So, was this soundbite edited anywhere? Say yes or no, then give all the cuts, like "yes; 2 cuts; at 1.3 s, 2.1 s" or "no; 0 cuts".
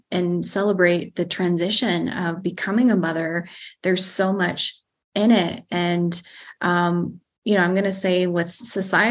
no; 0 cuts